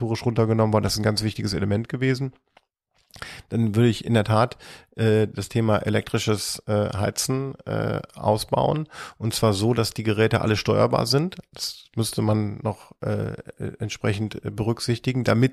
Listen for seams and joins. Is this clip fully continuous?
yes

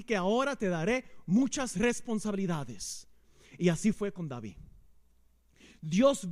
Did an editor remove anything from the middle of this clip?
no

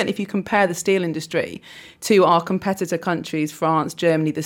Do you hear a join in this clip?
no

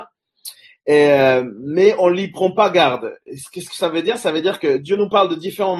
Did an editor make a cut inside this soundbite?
no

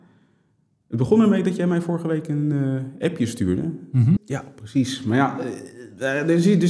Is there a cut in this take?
yes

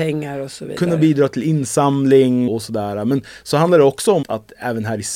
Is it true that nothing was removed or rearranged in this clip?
no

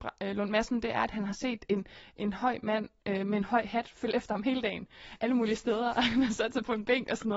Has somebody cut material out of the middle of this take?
no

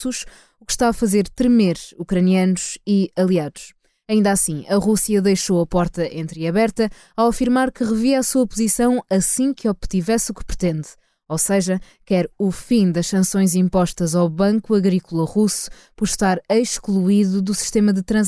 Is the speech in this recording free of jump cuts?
yes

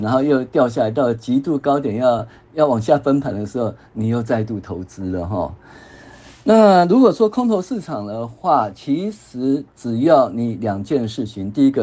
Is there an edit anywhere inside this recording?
no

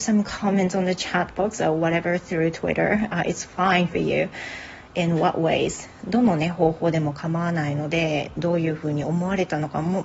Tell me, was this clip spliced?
no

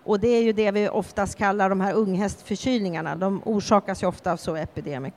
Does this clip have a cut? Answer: no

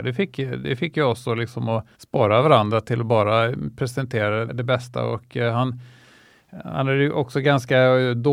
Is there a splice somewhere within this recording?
yes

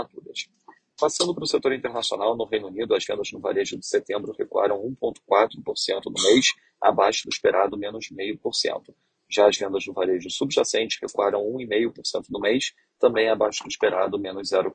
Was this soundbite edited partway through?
no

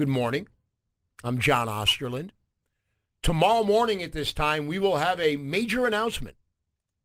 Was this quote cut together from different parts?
no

